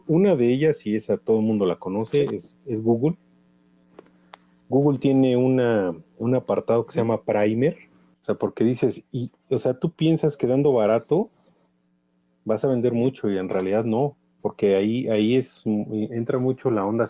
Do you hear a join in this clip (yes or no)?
yes